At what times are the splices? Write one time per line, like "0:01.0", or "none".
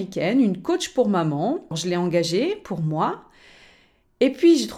0:01.7